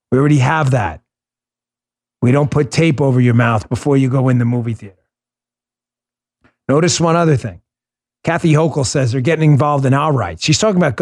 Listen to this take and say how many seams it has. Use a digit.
1